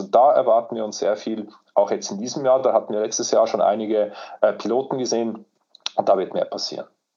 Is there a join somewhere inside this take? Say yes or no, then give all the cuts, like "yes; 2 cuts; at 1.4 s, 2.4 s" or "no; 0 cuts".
no; 0 cuts